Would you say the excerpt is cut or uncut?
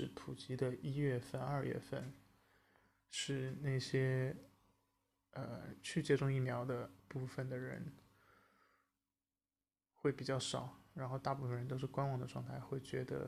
uncut